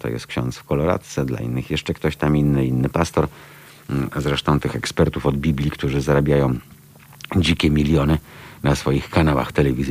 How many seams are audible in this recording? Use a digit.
0